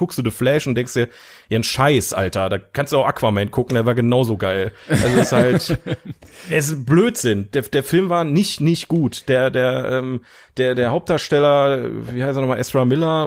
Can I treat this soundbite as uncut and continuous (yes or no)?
yes